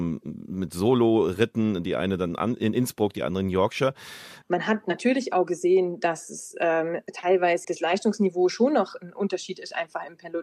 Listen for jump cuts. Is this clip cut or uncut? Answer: cut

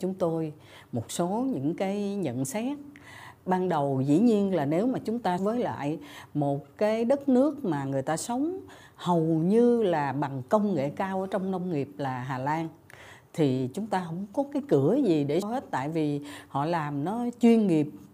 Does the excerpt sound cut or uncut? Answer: cut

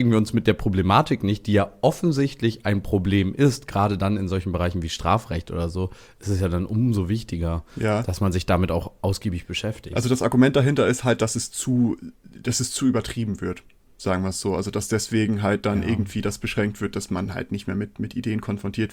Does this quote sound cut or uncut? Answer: uncut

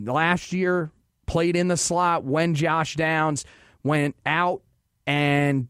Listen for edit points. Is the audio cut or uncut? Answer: uncut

